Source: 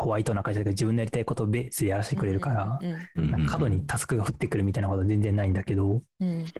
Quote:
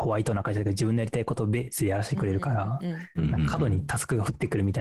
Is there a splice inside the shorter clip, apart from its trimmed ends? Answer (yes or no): no